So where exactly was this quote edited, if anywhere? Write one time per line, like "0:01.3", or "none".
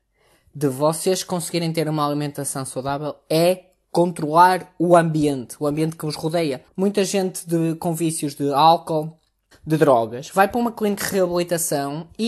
0:06.7
0:09.5